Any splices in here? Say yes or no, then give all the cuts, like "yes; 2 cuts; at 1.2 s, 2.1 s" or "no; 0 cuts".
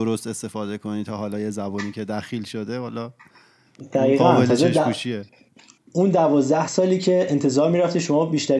no; 0 cuts